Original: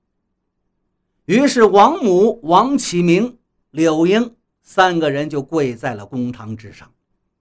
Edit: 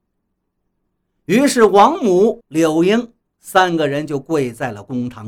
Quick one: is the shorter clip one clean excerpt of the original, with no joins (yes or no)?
no